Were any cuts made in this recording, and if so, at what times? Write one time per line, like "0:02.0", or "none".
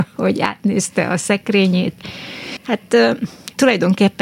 0:02.6